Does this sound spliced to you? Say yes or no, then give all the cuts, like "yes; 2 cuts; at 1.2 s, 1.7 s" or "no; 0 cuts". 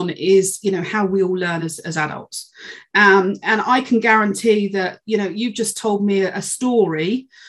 no; 0 cuts